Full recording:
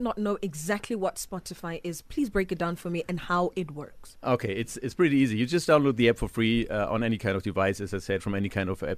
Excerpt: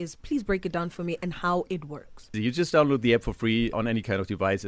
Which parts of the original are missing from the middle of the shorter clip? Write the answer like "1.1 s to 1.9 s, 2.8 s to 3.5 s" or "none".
4.2 s to 5.3 s, 6.7 s to 6.9 s